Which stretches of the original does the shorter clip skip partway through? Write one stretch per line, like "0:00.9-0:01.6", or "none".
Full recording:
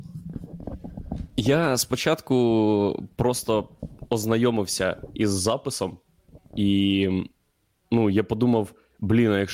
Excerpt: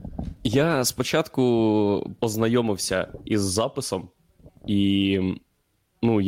0:03.1-0:04.1